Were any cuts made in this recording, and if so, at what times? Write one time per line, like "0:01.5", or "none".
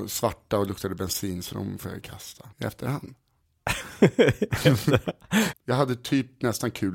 0:02.5
0:05.5